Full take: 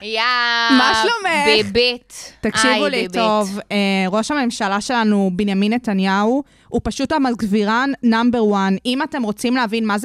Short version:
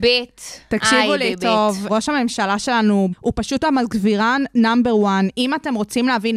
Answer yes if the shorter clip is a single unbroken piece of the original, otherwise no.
no